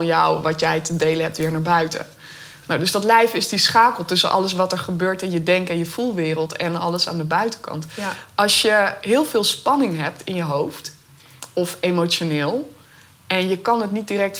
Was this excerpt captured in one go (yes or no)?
yes